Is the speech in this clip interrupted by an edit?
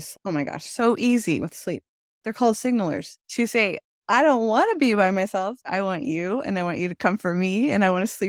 yes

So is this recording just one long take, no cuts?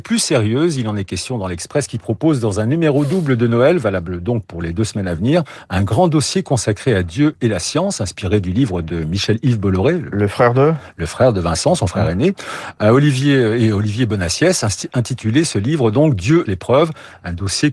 no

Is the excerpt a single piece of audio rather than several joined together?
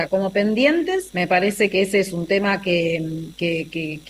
no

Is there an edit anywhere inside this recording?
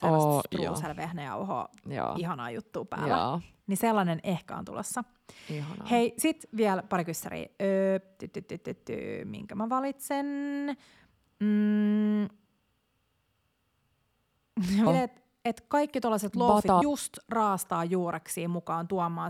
yes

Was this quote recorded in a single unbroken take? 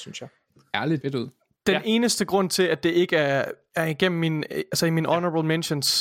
no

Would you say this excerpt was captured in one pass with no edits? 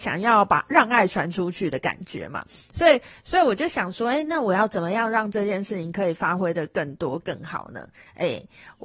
yes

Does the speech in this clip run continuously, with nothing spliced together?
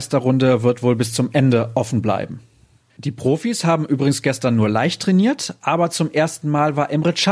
yes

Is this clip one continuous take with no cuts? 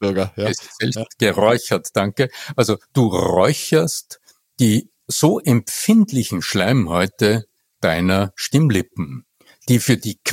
yes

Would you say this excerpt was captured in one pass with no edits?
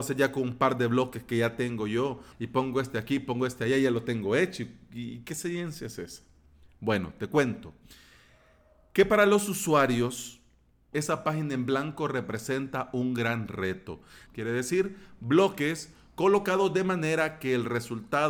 no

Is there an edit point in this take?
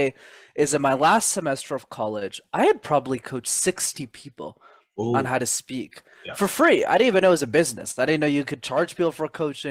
no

